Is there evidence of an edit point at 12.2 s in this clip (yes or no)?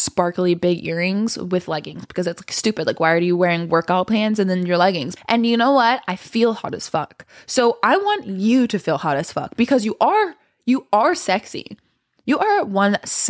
no